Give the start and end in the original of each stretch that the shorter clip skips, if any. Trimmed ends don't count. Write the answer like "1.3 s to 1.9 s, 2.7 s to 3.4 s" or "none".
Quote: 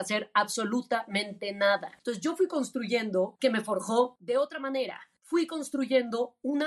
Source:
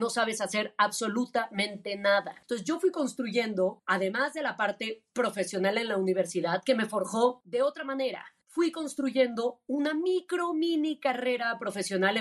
3.8 s to 6.6 s